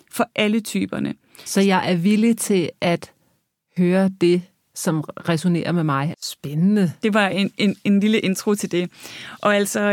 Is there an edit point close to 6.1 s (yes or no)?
yes